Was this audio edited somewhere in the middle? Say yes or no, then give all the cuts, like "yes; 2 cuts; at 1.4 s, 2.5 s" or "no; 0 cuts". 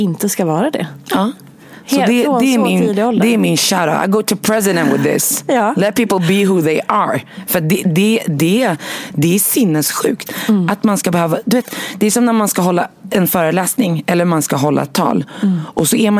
no; 0 cuts